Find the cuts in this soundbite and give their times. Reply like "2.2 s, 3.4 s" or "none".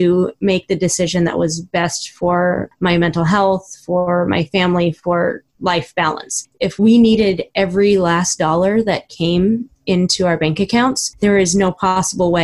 none